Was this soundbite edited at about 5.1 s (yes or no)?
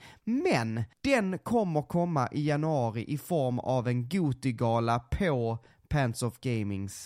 no